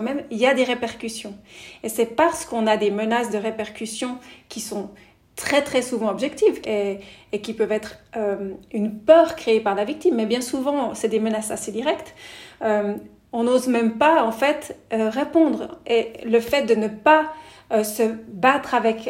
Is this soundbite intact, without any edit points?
no; 1 cut; at 6.6 s

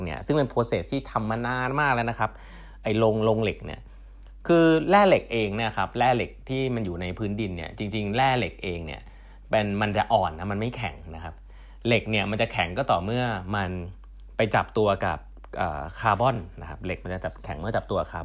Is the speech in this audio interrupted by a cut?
no; 0 cuts

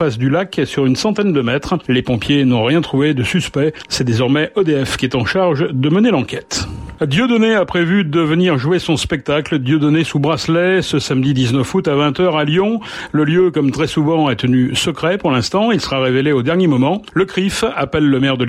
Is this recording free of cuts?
yes; 0 cuts

